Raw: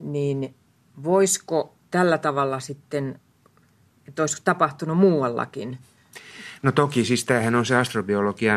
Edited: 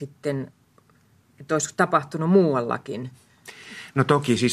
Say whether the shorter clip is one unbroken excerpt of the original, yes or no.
yes